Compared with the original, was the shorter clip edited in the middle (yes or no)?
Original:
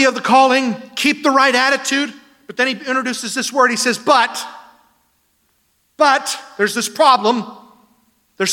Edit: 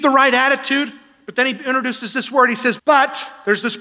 yes